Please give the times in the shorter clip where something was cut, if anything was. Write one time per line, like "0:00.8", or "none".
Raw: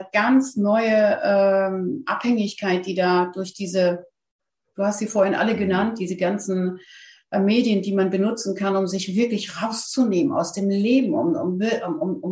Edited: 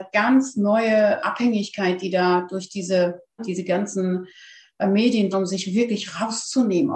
0:01.2
0:03.4
0:05.3

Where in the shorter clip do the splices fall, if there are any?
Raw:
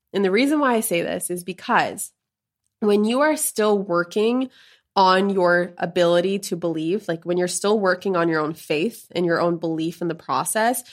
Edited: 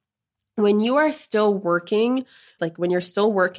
0:02.6

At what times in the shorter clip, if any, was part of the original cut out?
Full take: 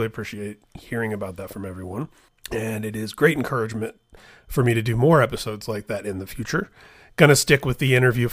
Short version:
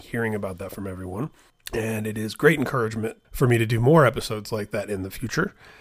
0:03.2

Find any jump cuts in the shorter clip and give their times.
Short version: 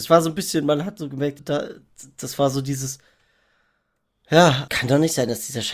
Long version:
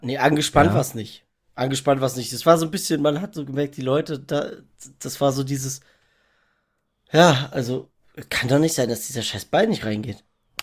0:01.4
0:04.7

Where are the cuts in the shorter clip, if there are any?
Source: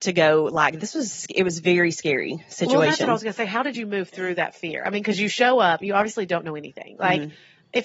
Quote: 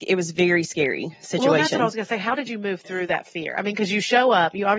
none

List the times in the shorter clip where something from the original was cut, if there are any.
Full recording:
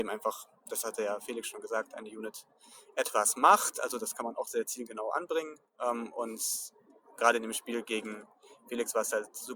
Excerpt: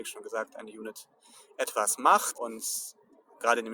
0:02.3

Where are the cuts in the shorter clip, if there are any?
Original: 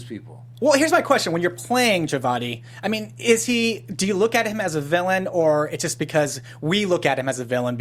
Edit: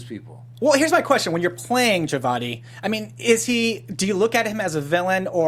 none

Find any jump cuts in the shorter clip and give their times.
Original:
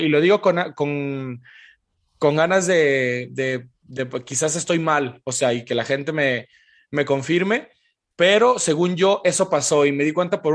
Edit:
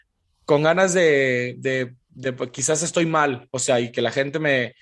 none

